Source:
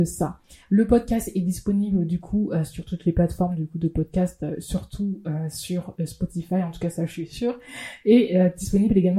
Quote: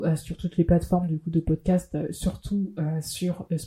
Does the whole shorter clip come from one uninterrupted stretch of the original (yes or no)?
yes